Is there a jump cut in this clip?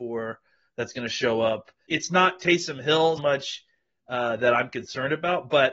yes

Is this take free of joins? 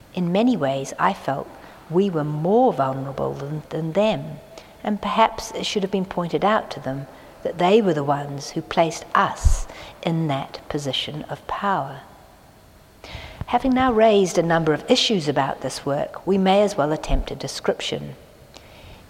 yes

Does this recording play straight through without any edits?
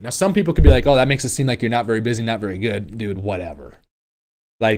yes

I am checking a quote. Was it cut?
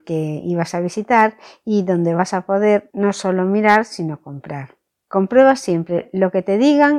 no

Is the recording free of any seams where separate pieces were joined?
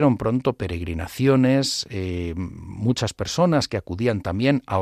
yes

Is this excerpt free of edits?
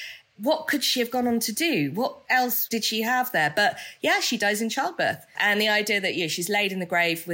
no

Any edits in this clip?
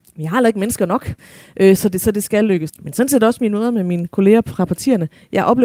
yes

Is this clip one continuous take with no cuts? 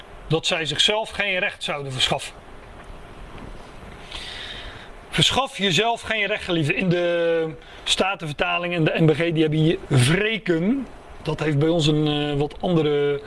yes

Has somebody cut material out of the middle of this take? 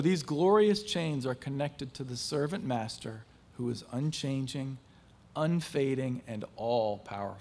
no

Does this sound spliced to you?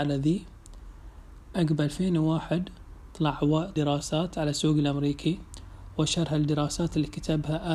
yes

